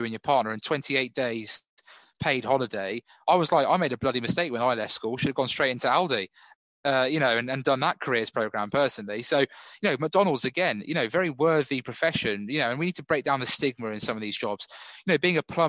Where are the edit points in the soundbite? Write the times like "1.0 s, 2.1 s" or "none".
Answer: none